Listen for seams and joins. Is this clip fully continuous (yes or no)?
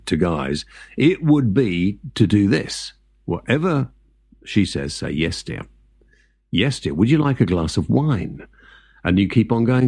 yes